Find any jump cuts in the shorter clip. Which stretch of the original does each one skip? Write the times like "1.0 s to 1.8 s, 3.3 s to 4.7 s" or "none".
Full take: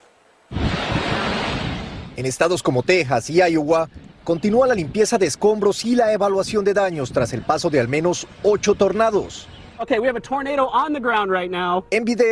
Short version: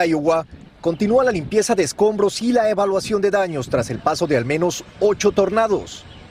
none